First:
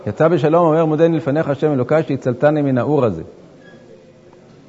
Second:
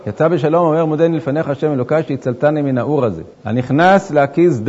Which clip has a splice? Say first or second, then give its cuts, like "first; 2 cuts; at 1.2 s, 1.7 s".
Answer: second; 1 cut; at 3.3 s